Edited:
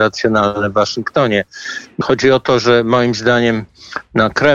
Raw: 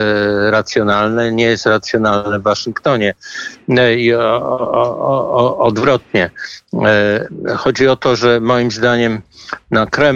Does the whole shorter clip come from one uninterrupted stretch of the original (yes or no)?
no